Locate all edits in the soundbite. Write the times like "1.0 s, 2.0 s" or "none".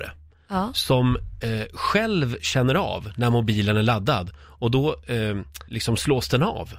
none